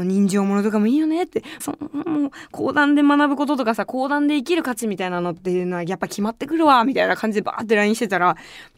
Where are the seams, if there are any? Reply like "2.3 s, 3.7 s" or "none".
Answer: 1.6 s